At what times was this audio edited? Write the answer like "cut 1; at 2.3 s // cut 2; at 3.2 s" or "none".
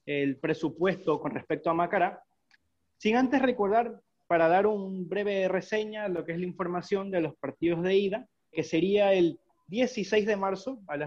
cut 1; at 8.5 s